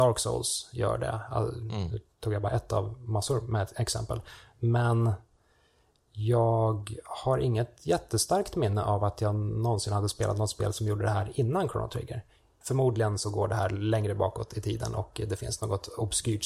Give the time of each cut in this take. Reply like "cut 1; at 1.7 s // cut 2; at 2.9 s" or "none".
cut 1; at 12.6 s